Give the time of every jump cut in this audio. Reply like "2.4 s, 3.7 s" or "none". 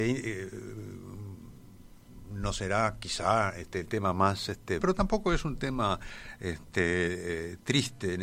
4.8 s